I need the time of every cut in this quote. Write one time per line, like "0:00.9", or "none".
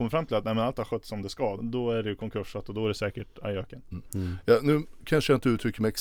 0:01.6